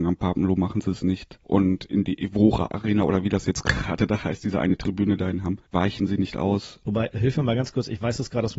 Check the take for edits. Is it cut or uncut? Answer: cut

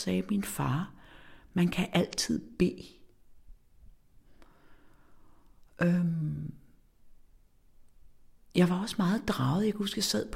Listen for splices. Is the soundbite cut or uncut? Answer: uncut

